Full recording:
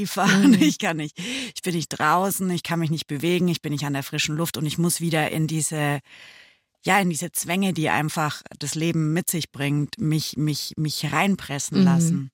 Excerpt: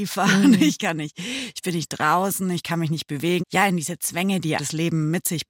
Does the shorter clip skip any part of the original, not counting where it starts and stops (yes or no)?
yes